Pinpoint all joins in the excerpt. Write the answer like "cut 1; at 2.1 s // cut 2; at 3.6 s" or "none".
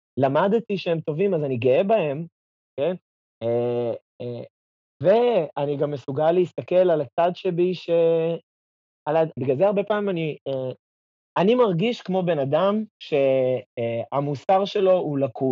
cut 1; at 9.4 s